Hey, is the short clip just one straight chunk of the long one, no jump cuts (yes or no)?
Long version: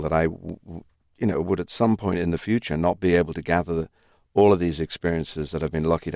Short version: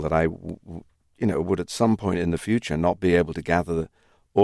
yes